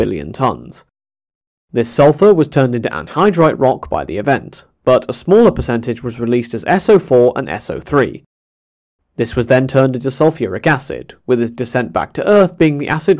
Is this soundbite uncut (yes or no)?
yes